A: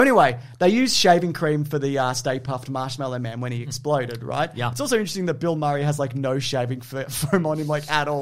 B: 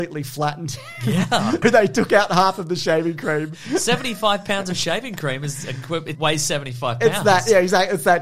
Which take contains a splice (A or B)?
B